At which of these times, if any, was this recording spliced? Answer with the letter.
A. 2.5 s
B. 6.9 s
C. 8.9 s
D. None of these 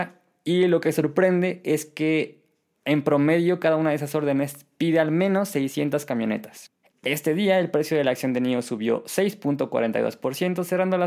B